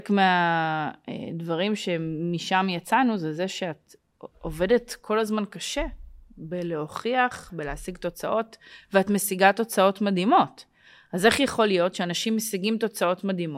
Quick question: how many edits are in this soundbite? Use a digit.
1